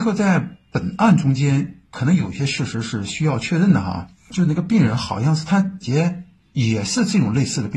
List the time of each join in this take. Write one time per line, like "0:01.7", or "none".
0:05.8

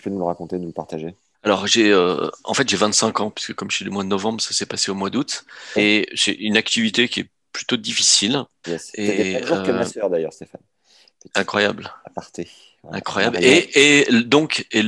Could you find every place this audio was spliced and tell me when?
0:05.8
0:08.6

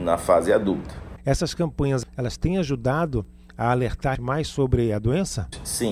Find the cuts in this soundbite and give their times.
0:01.2
0:04.2

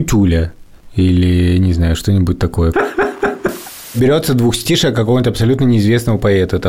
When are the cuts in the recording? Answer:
0:02.7

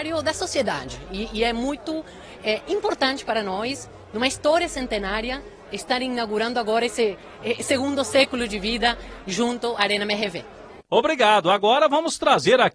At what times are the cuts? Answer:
none

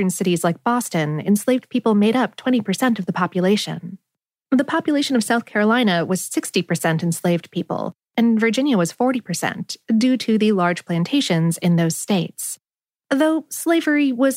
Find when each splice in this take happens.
0:04.3

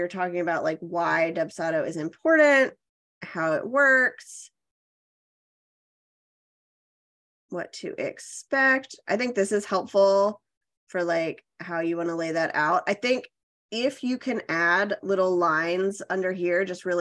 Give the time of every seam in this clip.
none

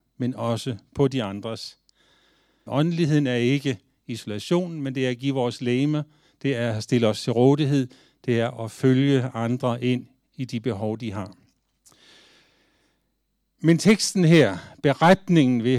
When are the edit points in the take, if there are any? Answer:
0:02.7

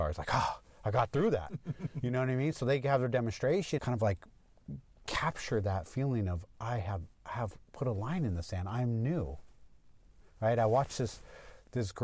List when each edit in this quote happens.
0:03.8
0:07.2

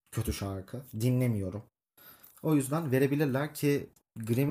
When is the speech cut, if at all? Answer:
0:02.3

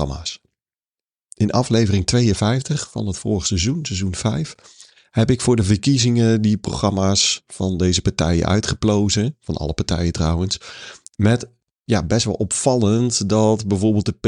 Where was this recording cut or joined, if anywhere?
none

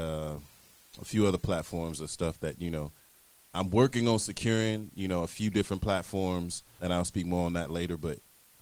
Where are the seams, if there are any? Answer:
0:06.8

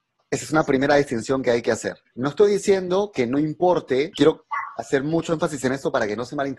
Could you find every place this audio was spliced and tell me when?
0:04.1

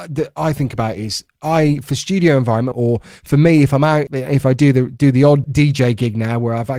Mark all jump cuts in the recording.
0:02.7
0:04.1
0:05.4

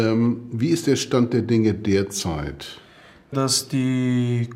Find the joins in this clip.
0:03.3

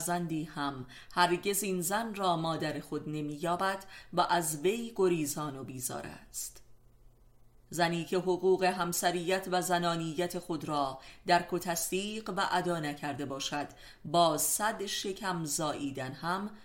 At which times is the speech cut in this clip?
none

